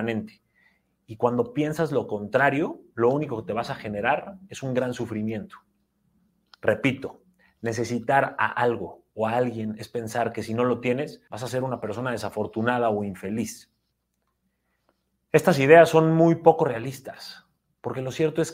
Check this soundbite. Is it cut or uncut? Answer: cut